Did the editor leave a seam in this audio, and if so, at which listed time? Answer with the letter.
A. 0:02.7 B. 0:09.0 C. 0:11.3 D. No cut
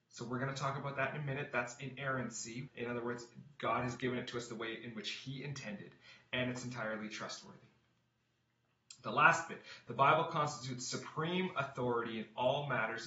A